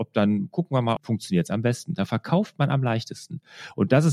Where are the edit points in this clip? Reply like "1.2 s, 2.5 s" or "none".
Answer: 1.0 s